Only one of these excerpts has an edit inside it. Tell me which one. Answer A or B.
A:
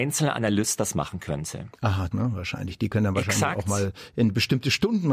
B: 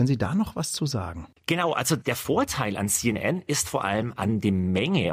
A